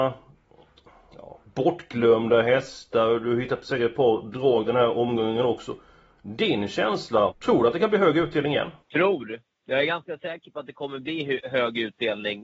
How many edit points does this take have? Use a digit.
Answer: 2